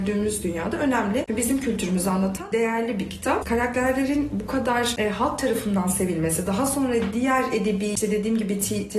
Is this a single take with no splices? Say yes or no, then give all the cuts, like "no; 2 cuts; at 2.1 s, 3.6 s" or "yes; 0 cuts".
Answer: no; 1 cut; at 3.4 s